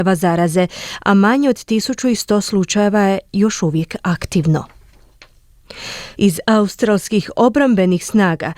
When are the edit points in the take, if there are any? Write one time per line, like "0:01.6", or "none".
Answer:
0:06.1